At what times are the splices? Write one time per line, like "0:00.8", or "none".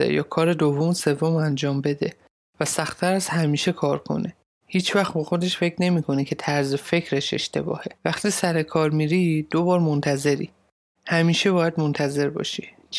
0:04.6
0:08.0
0:11.0